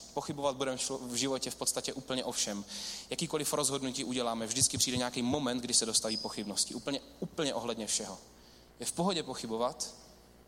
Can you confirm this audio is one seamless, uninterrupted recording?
yes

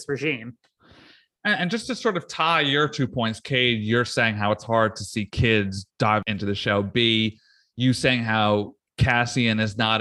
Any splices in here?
no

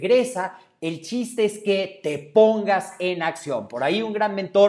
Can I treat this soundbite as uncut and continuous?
yes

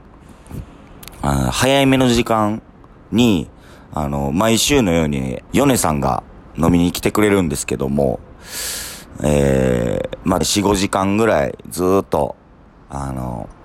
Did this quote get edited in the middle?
yes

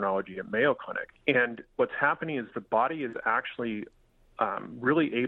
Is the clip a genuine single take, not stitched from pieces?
no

